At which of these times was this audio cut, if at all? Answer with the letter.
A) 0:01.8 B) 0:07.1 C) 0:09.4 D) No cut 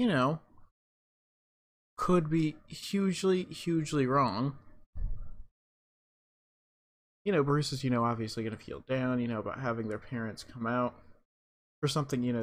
B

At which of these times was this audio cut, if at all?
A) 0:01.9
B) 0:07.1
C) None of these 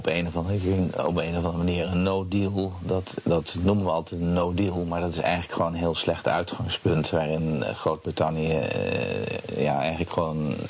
C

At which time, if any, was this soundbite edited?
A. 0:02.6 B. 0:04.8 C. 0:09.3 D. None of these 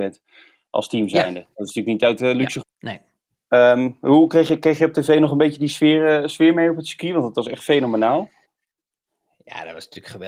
A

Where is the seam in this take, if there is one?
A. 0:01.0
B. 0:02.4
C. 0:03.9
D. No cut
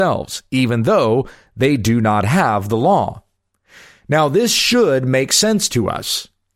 D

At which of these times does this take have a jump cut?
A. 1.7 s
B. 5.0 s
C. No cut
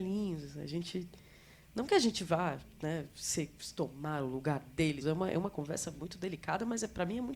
B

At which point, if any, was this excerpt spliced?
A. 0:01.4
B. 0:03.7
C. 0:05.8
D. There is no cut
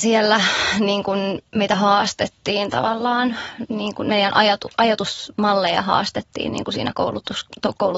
D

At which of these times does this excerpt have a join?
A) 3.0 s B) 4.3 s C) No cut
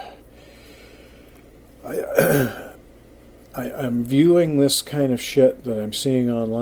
C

